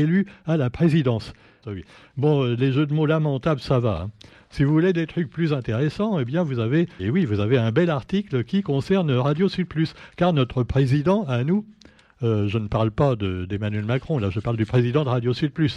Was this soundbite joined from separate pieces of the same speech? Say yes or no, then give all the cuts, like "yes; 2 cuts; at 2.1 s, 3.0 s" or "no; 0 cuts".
yes; 2 cuts; at 1.6 s, 7.0 s